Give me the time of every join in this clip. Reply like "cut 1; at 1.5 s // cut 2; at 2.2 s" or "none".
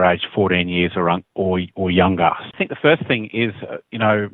cut 1; at 2.5 s

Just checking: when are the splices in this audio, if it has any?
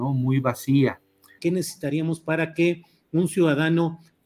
cut 1; at 1.4 s

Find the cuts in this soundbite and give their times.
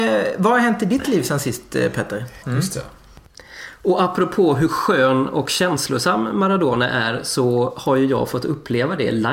cut 1; at 2.4 s

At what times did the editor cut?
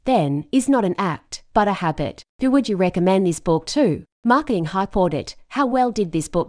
cut 1; at 4.1 s

